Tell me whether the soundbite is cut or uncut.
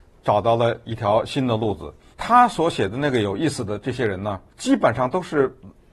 cut